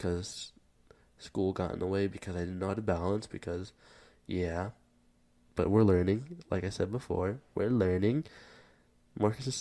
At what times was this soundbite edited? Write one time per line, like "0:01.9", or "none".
none